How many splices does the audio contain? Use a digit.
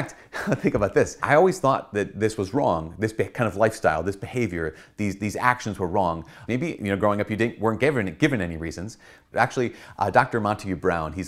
2